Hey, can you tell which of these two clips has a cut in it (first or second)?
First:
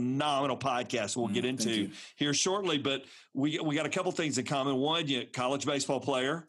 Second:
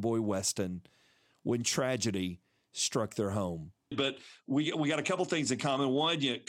second